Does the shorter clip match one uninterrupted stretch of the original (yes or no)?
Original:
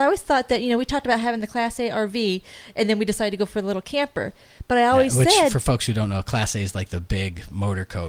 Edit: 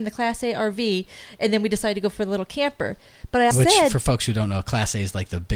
no